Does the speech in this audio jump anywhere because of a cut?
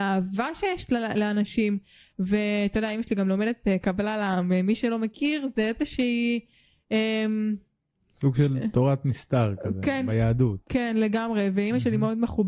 yes; 1 cut; at 3.8 s

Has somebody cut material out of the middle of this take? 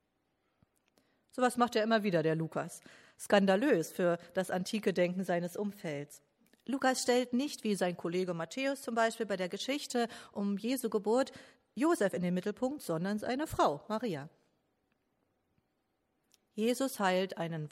no; 0 cuts

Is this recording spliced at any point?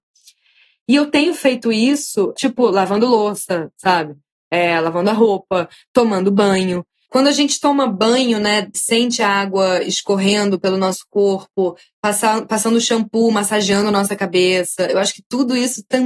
yes; 2 cuts; at 2.3 s, 8.7 s

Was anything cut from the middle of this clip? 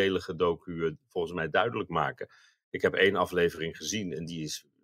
no; 0 cuts

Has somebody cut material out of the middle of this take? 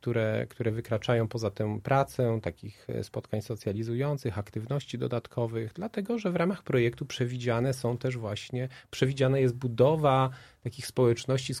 no; 0 cuts

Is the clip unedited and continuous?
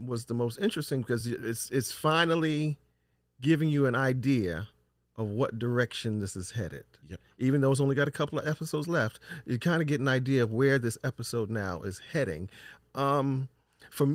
yes; 0 cuts

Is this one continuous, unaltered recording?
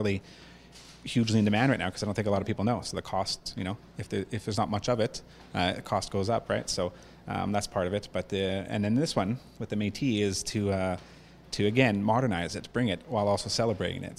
yes; 0 cuts

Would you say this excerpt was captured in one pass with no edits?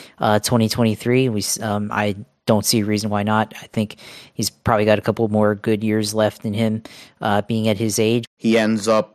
no; 1 cut; at 8.2 s

